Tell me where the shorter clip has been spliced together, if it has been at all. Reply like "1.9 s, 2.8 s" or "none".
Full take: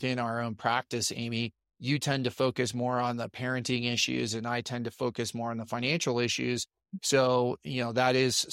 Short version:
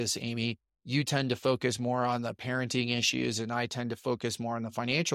none